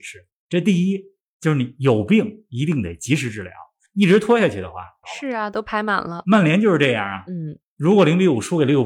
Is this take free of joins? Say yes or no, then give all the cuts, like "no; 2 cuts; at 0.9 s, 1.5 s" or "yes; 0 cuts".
no; 1 cut; at 5.0 s